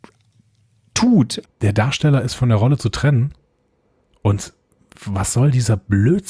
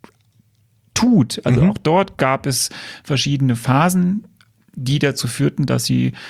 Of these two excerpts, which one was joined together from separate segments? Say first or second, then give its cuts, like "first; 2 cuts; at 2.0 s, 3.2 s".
first; 1 cut; at 1.4 s